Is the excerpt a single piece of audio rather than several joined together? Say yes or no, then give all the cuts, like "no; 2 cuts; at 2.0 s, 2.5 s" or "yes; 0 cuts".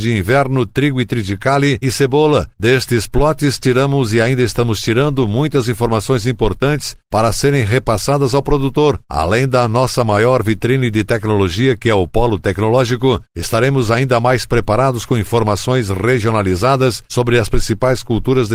yes; 0 cuts